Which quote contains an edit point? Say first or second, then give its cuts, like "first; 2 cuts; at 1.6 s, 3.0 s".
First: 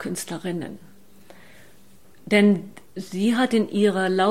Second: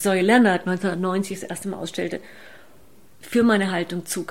second; 1 cut; at 3.1 s